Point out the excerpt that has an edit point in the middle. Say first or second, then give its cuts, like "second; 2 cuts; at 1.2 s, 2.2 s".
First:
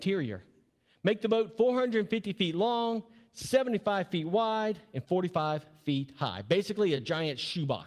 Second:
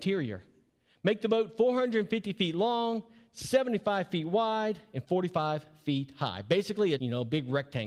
second; 1 cut; at 7.0 s